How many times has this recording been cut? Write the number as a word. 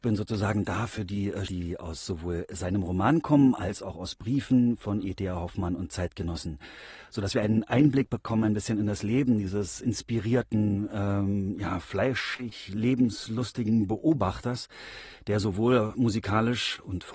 one